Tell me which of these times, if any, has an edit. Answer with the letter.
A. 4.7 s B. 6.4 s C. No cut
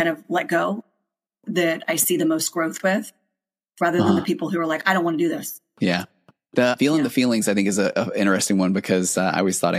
C